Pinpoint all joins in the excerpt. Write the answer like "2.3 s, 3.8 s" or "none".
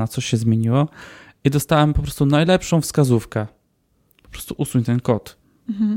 none